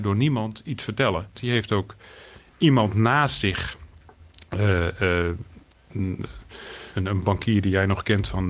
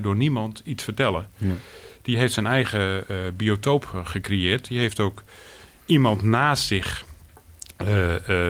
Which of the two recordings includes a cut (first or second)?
first